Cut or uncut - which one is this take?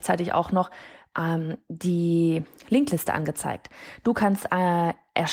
uncut